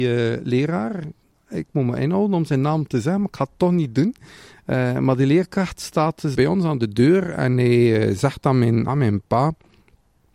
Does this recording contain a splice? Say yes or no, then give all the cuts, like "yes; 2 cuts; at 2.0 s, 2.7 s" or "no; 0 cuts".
yes; 2 cuts; at 6.3 s, 8.9 s